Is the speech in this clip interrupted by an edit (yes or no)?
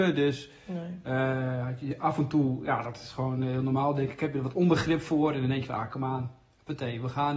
no